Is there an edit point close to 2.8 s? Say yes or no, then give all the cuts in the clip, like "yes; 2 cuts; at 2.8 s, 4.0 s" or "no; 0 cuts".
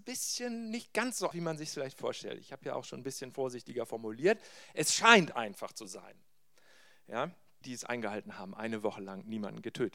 no; 2 cuts; at 1.3 s, 7.6 s